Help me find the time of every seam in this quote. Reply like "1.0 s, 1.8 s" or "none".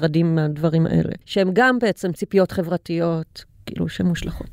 1.2 s

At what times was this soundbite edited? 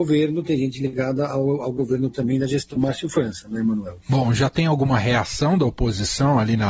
4.0 s

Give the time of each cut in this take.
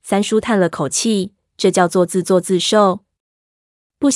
3.1 s

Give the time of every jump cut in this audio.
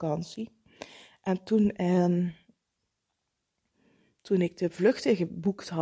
none

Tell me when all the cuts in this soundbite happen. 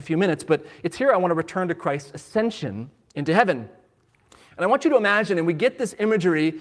none

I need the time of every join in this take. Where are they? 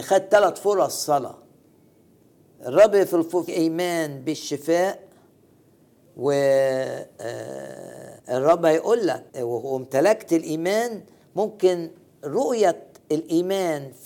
3.5 s, 8.2 s, 9.3 s

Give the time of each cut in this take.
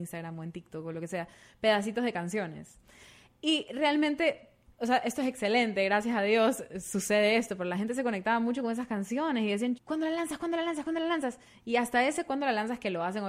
9.8 s

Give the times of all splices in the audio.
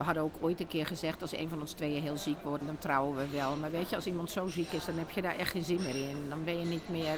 2.6 s

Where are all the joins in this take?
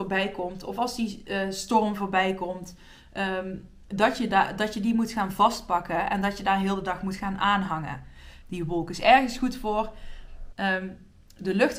8.4 s, 10.5 s

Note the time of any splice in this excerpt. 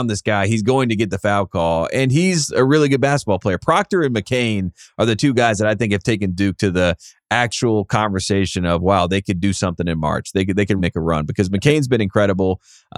10.8 s

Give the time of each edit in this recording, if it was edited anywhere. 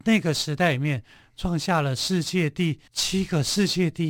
2.9 s

